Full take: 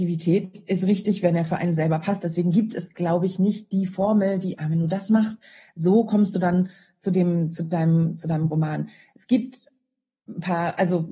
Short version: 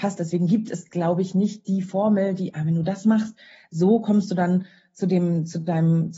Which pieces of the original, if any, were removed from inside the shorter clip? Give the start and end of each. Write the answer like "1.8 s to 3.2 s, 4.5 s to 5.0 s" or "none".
none